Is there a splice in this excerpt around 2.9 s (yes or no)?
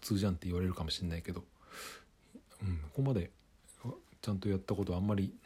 yes